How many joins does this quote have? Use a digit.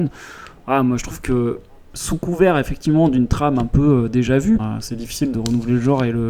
1